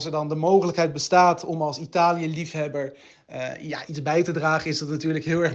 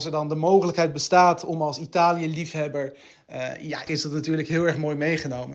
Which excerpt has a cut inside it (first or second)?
second